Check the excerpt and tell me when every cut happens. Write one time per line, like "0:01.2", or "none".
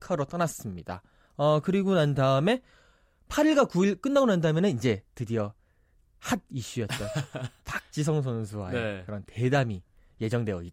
none